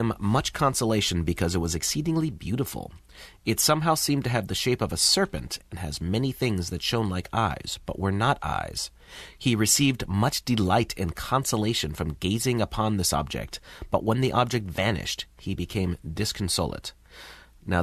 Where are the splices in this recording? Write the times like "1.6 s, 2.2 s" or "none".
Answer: none